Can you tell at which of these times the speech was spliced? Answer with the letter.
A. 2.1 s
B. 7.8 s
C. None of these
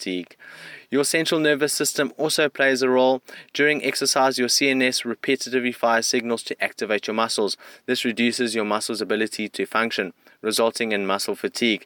B